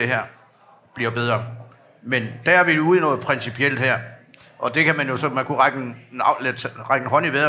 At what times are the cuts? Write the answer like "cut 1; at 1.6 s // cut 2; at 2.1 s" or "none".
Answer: none